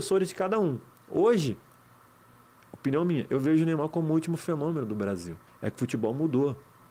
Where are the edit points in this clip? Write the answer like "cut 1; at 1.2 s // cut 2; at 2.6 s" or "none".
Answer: cut 1; at 5.5 s